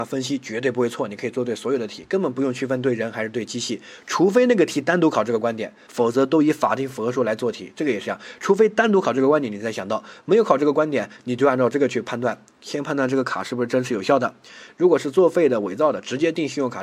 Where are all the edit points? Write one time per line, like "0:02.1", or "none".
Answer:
0:05.9